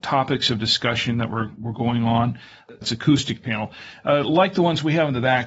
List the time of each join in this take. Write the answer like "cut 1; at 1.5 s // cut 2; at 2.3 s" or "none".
cut 1; at 2.8 s